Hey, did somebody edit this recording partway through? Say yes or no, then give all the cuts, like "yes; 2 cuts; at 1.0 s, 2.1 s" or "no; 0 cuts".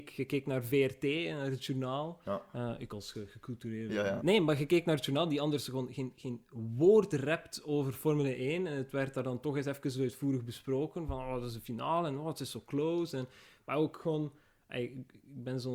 yes; 1 cut; at 4.2 s